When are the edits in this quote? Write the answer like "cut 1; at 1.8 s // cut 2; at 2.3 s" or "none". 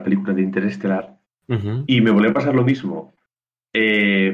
none